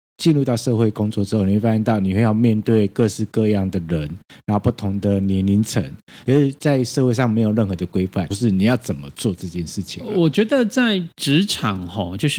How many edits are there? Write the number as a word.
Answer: two